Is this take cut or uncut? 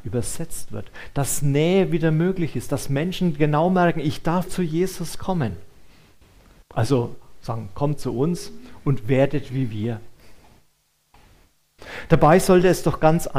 cut